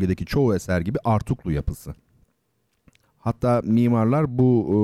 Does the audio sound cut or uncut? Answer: cut